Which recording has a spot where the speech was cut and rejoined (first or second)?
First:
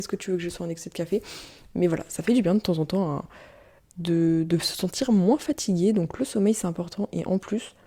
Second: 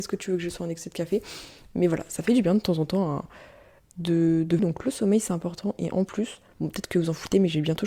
second